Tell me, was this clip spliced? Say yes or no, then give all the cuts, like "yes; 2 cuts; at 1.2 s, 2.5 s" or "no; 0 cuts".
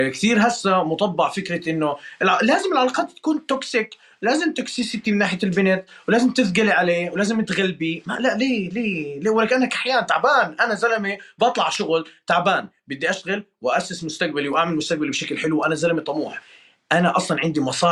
no; 0 cuts